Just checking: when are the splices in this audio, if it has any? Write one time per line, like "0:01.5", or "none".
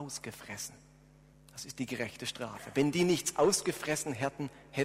0:01.3